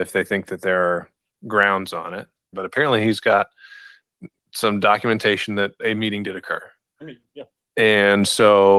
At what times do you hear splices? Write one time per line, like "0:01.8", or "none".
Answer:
0:02.5